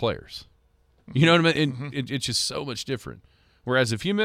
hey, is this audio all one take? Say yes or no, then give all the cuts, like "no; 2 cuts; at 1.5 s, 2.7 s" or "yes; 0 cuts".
yes; 0 cuts